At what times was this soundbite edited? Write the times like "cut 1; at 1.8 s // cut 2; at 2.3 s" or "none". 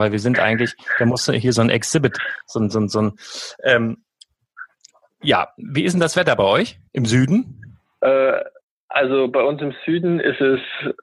cut 1; at 6.9 s